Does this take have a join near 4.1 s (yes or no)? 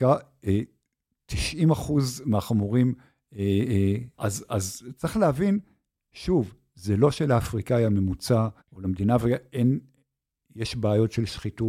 yes